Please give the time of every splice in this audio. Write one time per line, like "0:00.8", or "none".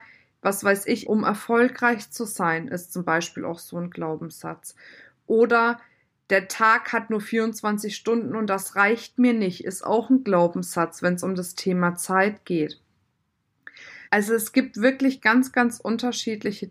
0:01.0
0:14.1